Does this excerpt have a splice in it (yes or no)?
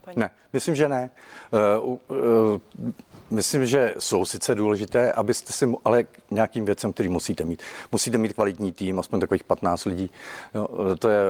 no